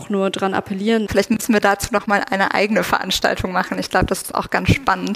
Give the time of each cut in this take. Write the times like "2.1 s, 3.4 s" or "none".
1.1 s